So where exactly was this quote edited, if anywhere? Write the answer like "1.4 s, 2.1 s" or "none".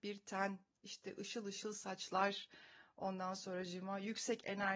none